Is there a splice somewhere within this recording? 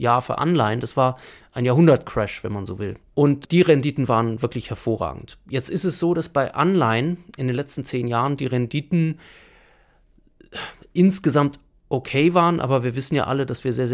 yes; 1 cut; at 3.0 s

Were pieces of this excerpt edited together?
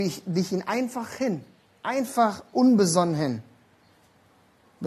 no; 0 cuts

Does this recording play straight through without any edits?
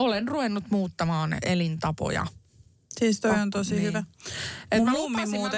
yes; 0 cuts

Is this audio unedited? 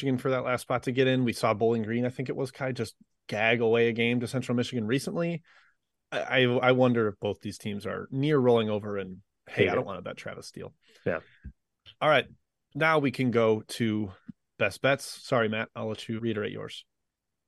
no; 1 cut; at 16.2 s

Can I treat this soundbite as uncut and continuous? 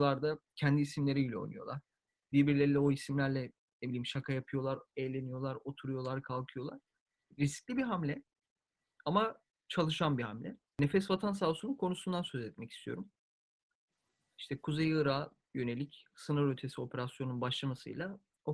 yes; 0 cuts

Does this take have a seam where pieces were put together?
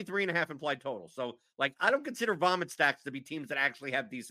no; 0 cuts

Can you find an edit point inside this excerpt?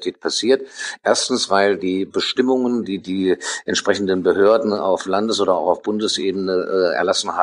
no; 0 cuts

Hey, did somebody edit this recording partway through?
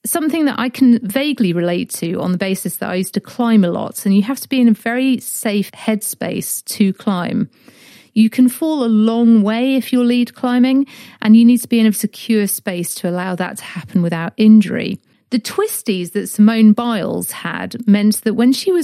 yes; 1 cut; at 11.9 s

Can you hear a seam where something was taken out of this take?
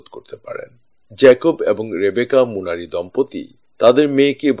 no; 0 cuts

